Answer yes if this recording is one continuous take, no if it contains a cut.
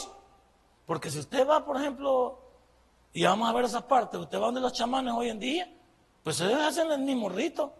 yes